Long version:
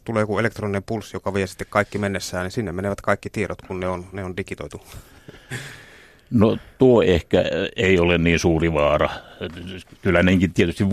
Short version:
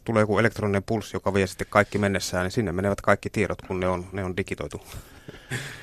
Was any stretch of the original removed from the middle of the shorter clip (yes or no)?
no